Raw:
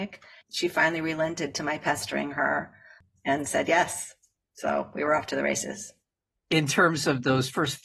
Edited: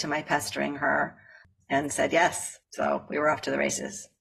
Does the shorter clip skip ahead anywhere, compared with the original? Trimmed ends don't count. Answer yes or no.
yes